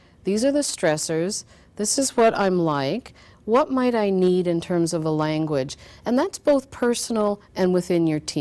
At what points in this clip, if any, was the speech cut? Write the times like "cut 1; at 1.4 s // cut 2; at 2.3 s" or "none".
none